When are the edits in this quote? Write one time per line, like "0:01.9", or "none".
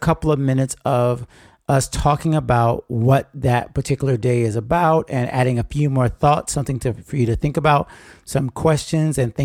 none